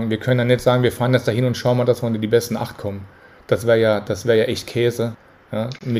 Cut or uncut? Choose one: uncut